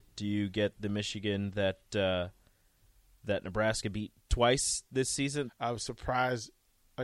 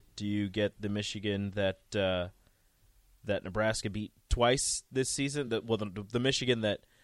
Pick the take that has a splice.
first; 1 cut; at 5.5 s

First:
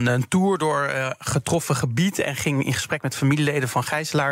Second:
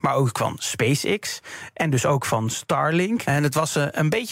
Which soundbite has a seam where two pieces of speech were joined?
second; 1 cut; at 3.2 s

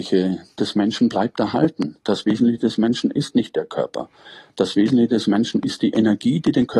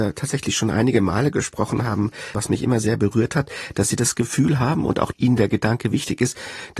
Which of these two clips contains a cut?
second; 1 cut; at 2.3 s

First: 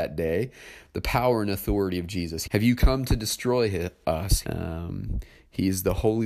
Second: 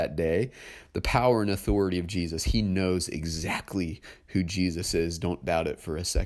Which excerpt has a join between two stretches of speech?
first; 2 cuts; at 2.4 s, 4.4 s

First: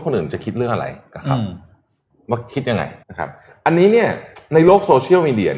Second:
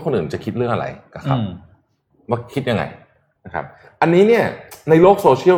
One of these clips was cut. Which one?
first; 1 cut; at 3.0 s

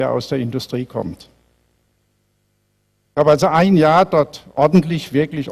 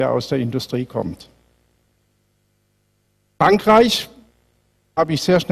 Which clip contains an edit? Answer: first; 1 cut; at 3.1 s

